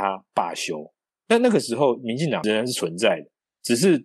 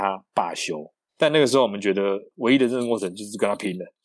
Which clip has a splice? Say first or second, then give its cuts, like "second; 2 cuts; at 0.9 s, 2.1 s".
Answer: second; 1 cut; at 1.1 s